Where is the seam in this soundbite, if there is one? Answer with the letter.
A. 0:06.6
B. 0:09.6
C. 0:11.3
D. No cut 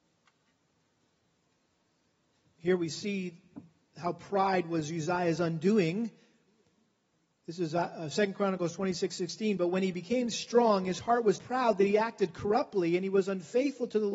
C